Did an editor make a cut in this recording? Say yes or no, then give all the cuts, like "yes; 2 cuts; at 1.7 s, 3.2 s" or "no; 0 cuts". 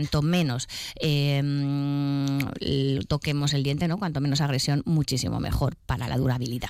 no; 0 cuts